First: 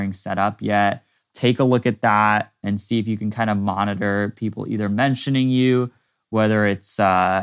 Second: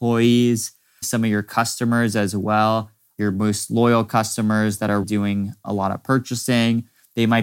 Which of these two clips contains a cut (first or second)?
second